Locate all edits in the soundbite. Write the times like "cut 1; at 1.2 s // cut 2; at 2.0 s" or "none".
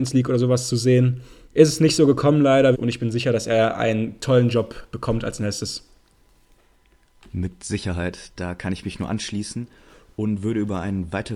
cut 1; at 2.7 s